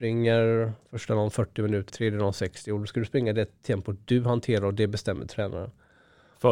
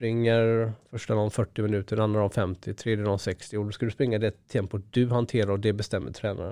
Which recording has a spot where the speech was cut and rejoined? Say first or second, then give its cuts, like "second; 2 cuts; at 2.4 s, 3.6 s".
first; 1 cut; at 1.9 s